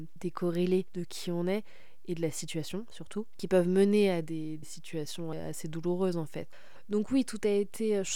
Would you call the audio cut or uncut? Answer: uncut